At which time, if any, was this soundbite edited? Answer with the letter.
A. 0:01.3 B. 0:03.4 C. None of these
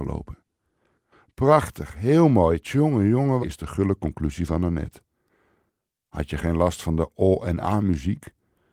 B